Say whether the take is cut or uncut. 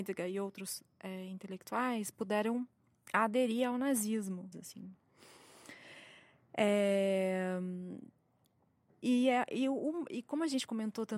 cut